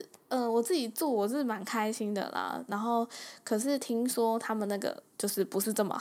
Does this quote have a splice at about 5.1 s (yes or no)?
yes